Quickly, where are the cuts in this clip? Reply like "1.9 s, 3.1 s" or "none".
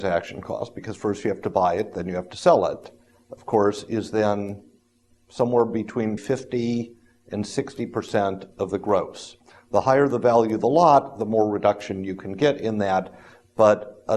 6.2 s